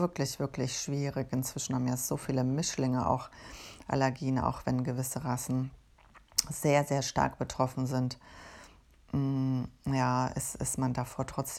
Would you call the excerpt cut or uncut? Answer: uncut